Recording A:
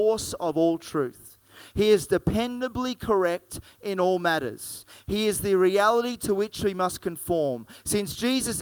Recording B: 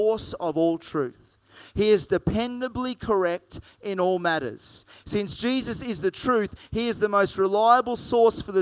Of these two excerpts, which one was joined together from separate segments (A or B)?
B